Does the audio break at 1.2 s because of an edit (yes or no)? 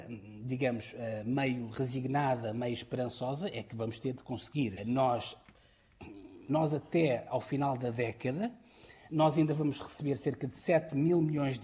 no